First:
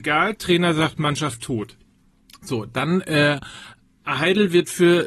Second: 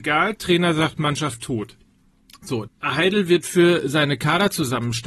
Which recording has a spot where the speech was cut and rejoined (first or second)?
second